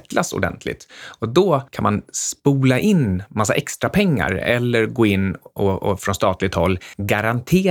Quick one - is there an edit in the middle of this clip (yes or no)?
no